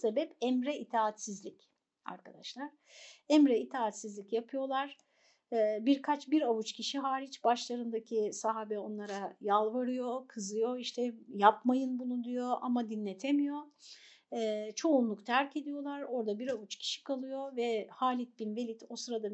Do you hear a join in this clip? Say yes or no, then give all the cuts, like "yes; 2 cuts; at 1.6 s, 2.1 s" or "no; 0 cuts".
no; 0 cuts